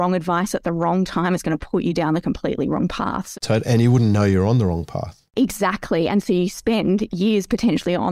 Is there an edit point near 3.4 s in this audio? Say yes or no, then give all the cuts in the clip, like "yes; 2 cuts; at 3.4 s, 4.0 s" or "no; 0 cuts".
no; 0 cuts